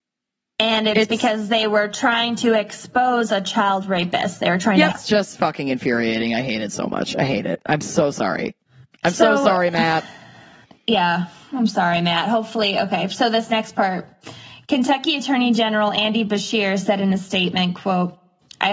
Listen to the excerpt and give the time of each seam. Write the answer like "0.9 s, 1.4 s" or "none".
4.9 s